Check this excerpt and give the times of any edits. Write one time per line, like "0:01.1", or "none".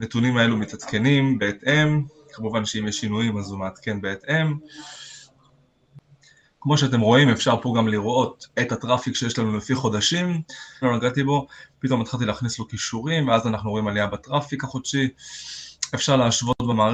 0:10.8